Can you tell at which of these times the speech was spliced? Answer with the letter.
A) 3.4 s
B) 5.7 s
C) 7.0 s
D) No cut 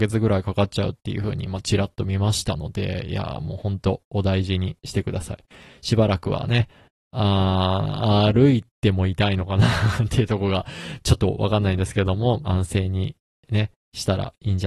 D